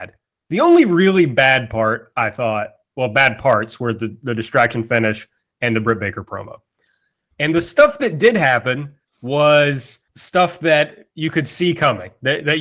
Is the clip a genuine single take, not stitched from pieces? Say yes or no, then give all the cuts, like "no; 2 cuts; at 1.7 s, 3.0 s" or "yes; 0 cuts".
no; 2 cuts; at 7.3 s, 10.1 s